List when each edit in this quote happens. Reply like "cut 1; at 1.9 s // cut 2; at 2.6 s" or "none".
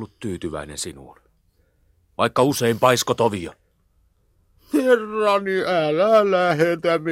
cut 1; at 4.7 s